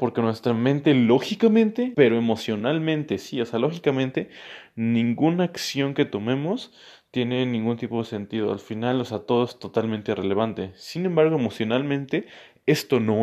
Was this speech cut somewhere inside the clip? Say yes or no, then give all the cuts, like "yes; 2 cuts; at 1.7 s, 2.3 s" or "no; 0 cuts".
yes; 1 cut; at 1.9 s